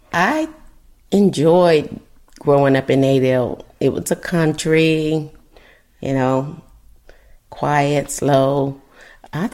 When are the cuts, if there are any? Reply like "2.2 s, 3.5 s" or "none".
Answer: none